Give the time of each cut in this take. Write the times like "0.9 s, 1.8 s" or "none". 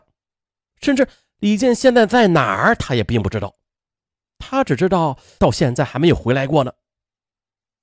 5.4 s